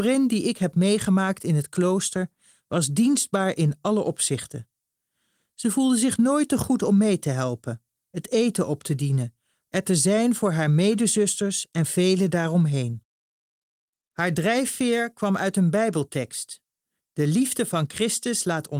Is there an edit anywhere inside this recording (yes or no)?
yes